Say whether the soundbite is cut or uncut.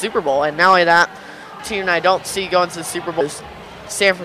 cut